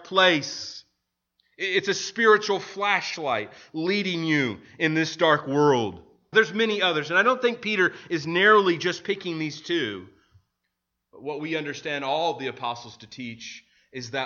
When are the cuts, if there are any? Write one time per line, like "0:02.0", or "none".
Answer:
0:06.3